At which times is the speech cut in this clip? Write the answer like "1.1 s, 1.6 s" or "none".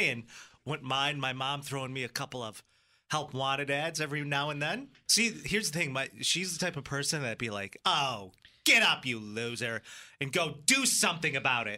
5.1 s